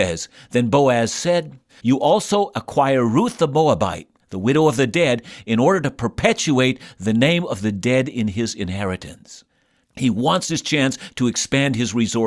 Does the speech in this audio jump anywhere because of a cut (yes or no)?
yes